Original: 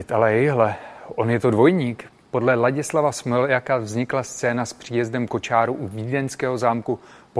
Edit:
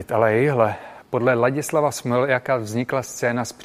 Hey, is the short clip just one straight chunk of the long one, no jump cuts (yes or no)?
no